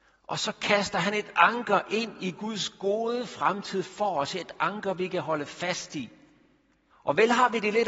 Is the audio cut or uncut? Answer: cut